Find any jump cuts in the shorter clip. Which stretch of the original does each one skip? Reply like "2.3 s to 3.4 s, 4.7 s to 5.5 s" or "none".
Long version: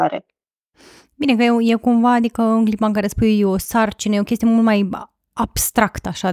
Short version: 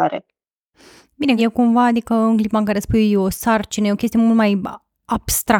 1.4 s to 1.6 s